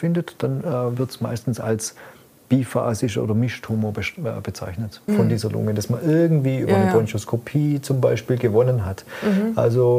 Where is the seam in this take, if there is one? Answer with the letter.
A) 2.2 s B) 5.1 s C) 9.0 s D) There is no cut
B